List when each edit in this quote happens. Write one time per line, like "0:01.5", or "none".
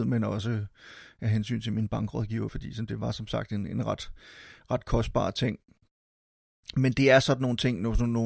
0:02.5

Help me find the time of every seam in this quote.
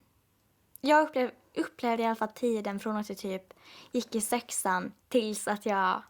0:05.0

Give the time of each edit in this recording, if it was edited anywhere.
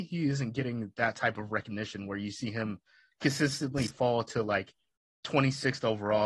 none

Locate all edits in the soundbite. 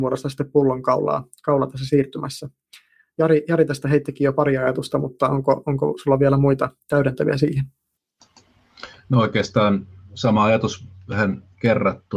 none

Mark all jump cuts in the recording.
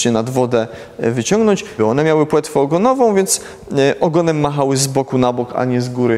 0:01.8

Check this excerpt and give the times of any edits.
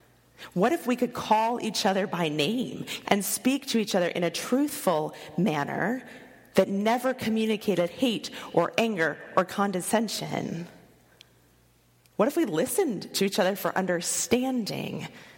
0:03.0

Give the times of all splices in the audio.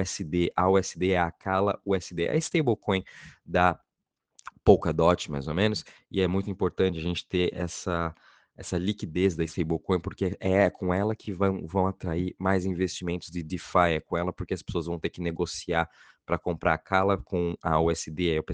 none

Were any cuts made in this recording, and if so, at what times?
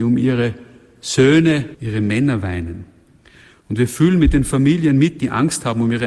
0:01.7

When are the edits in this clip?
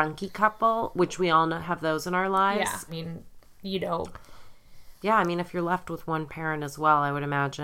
0:02.9

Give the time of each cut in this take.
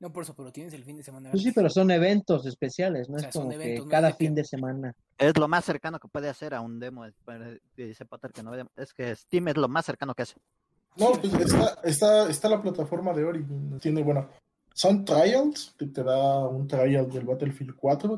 0:13.8
0:15.8

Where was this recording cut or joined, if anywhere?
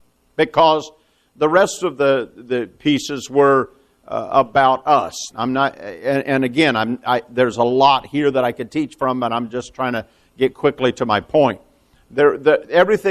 0:05.3

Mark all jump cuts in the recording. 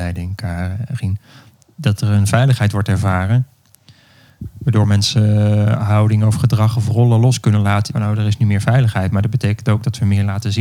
0:07.9

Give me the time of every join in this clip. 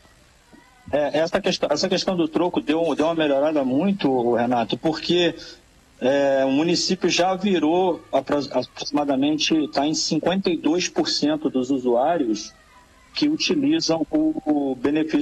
none

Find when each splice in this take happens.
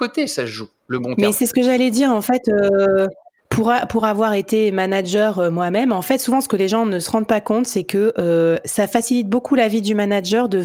none

